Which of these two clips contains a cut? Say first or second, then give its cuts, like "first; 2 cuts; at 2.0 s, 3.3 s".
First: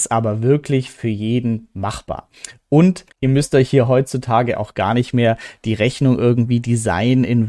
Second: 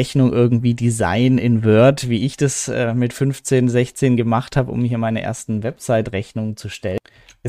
first; 1 cut; at 3.1 s